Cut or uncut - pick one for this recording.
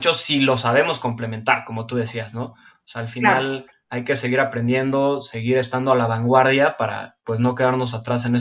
cut